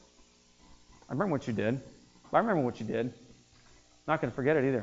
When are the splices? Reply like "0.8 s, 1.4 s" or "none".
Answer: 2.2 s

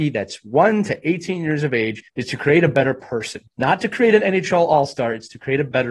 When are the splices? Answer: 2.1 s, 3.5 s

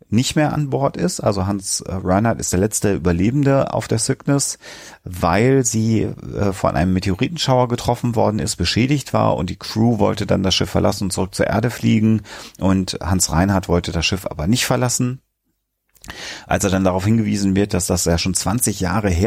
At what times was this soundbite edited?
none

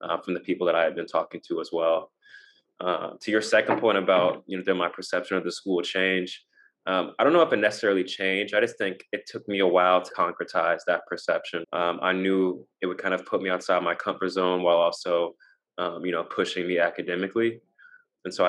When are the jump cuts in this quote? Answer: 10.1 s, 11.6 s

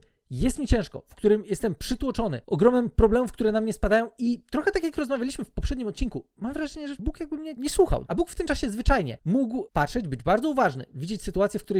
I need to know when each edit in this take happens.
8.1 s

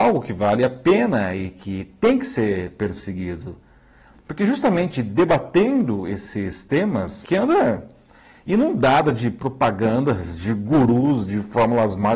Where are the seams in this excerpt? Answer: 7.2 s

